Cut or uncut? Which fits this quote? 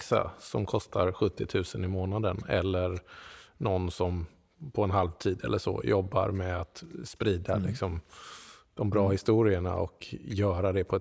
uncut